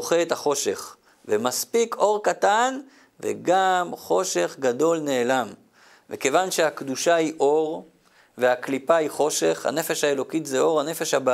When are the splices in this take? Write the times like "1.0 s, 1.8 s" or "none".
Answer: none